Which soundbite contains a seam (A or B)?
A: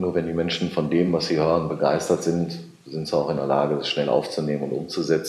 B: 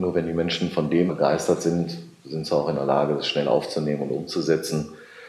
B